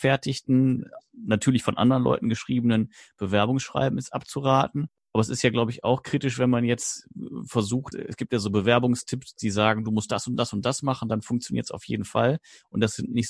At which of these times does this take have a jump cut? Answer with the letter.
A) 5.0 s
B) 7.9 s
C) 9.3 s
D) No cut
B